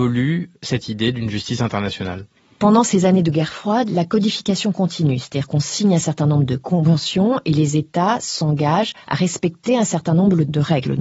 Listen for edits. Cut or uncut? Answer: uncut